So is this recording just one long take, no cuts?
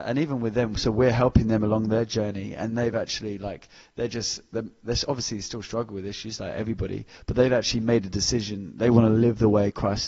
yes; 0 cuts

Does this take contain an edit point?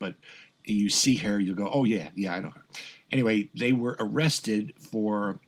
no; 0 cuts

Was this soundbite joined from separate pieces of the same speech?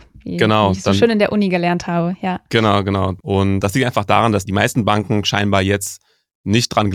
no; 0 cuts

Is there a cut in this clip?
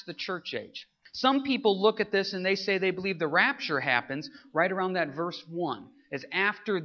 no; 0 cuts

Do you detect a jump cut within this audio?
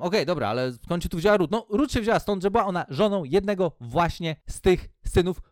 no; 0 cuts

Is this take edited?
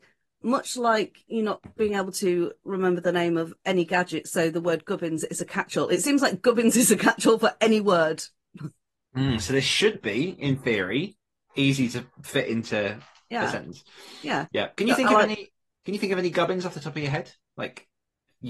no; 0 cuts

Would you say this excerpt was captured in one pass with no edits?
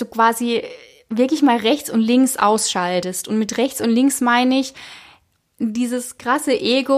yes; 0 cuts

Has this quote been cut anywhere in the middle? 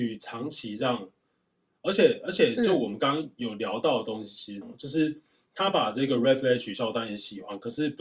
yes; 1 cut; at 4.6 s

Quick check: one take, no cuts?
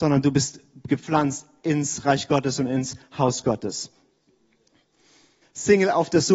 no; 1 cut; at 5.4 s

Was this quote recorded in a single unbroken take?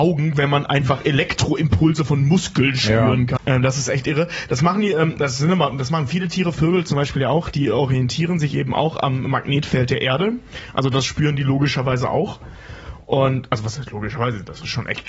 no; 1 cut; at 3.4 s

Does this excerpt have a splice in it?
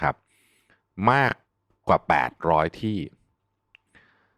no; 0 cuts

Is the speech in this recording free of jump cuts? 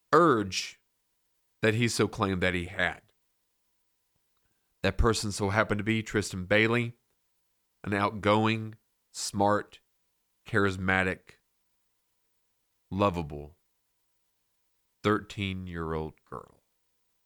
yes; 0 cuts

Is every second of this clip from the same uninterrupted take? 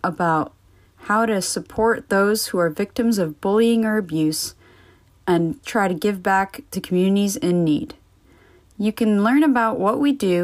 no; 1 cut; at 5.6 s

